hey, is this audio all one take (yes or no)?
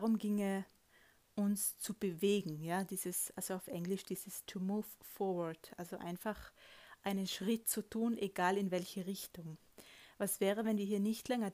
yes